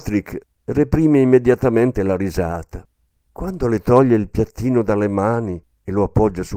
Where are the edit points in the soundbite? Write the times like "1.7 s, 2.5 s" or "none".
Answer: 3.2 s